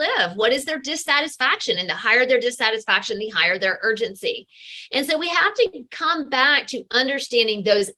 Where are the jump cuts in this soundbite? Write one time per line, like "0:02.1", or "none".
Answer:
none